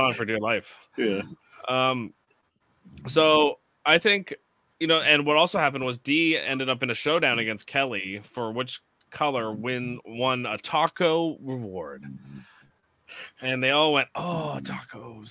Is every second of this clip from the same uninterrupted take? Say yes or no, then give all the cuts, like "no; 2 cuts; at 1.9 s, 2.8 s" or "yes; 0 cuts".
yes; 0 cuts